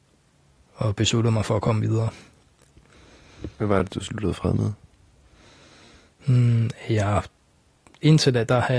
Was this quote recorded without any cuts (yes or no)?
yes